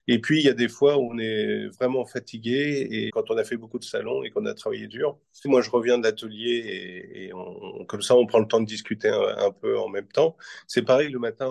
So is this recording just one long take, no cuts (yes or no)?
no